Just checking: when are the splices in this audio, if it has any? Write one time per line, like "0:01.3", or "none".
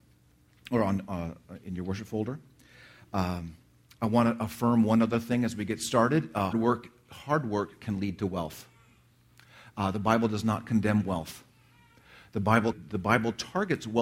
0:06.5
0:12.7